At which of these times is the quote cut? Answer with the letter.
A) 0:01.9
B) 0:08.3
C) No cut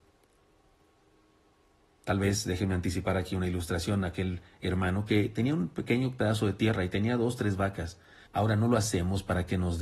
B